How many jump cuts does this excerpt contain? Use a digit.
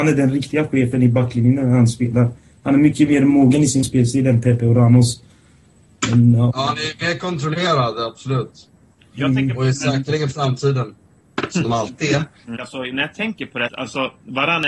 3